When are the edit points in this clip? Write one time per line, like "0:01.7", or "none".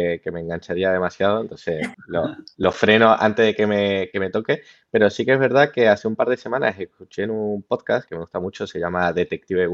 0:01.9
0:08.1